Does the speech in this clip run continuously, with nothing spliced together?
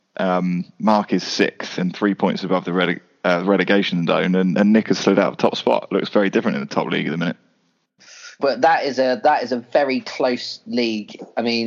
no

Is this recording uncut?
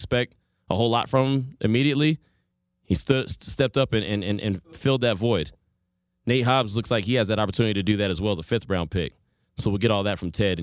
yes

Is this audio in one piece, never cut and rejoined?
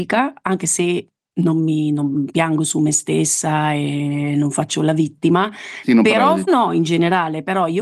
no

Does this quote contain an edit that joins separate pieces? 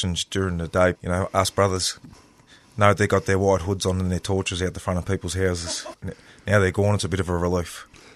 yes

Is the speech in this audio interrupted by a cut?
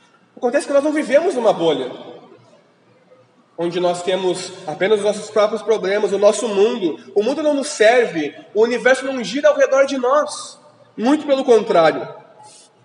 no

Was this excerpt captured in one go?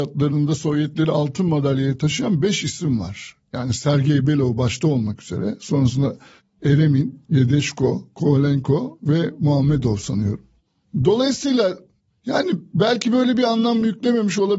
yes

